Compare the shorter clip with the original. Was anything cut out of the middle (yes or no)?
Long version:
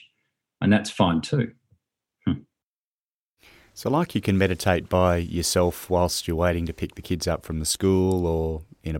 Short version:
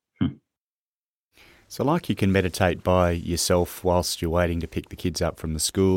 no